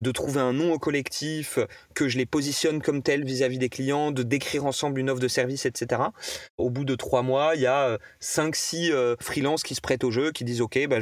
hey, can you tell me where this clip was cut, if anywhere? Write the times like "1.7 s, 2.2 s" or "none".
none